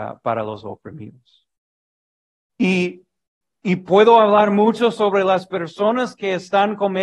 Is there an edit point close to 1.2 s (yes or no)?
no